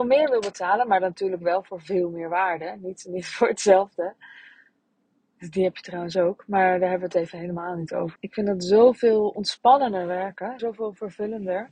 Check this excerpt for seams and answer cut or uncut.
cut